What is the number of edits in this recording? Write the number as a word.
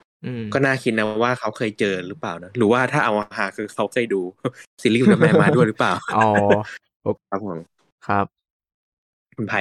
one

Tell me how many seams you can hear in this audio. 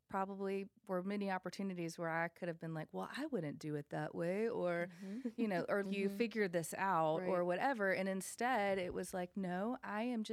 one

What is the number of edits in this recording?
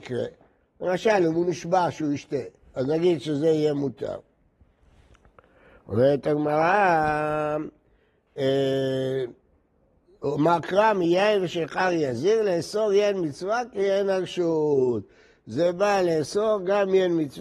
zero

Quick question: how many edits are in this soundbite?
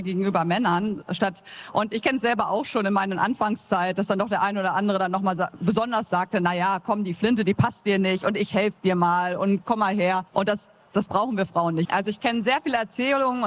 two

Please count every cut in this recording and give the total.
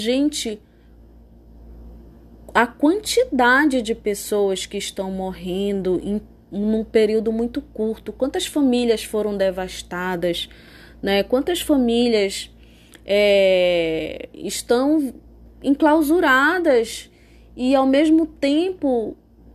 zero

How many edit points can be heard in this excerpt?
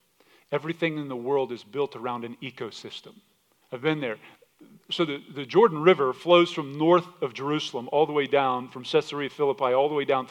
one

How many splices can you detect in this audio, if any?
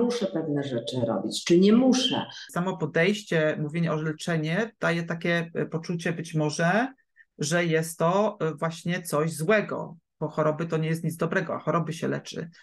one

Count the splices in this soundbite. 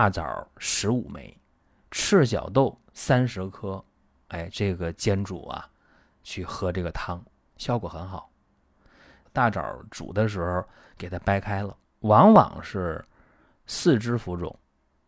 two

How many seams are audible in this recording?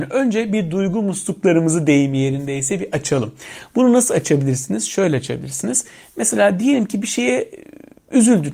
zero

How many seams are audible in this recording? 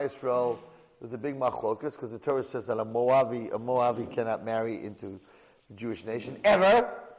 zero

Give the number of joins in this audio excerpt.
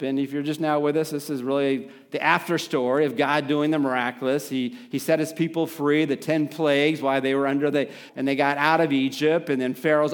one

